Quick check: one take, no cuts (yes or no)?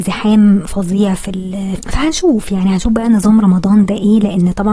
no